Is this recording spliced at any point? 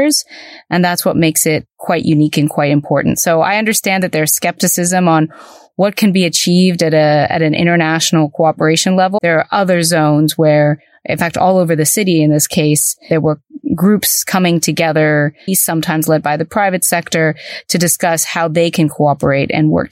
yes; 2 cuts; at 9.2 s, 15.5 s

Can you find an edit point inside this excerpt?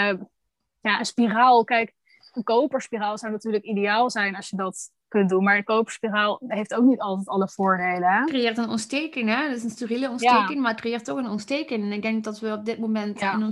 no; 0 cuts

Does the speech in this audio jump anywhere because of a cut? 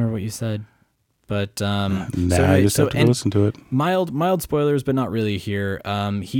no; 0 cuts

